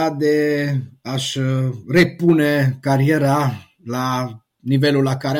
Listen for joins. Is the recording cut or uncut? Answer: uncut